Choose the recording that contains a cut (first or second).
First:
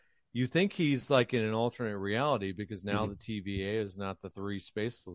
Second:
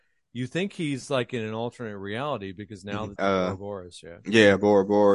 second